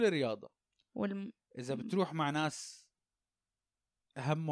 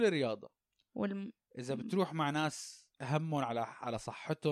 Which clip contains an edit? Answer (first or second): second